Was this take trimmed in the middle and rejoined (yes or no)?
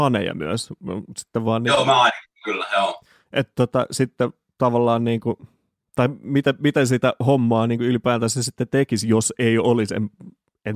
no